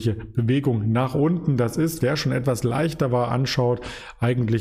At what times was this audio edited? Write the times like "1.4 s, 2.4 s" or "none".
2.0 s